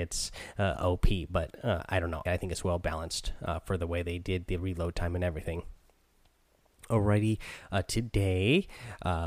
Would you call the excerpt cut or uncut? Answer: cut